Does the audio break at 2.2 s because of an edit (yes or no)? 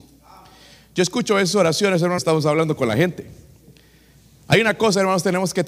yes